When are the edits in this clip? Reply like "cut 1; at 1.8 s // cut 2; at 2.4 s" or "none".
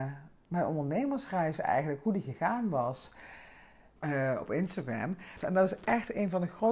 cut 1; at 4.0 s // cut 2; at 5.4 s